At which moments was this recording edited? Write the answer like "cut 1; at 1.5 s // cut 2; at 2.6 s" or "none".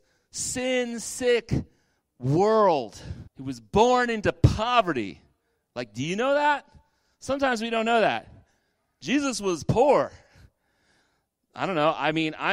cut 1; at 3.3 s